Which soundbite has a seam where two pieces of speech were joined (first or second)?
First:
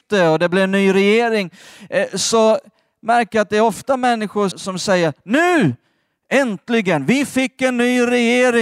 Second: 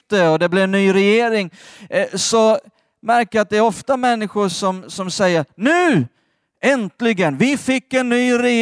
first